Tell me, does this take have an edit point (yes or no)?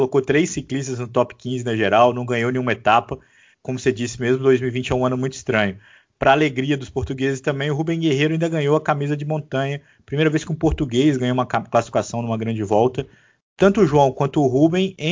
no